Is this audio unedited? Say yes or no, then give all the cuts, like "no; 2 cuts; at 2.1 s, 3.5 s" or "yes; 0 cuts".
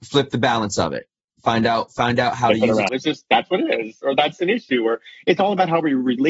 no; 1 cut; at 2.9 s